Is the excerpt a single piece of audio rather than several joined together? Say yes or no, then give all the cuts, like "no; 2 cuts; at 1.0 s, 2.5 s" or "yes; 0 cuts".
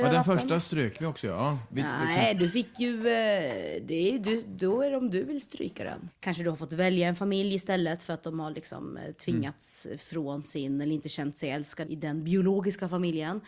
no; 2 cuts; at 6.1 s, 11.9 s